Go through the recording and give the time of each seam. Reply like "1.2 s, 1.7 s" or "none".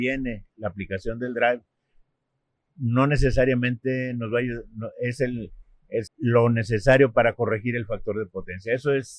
6.1 s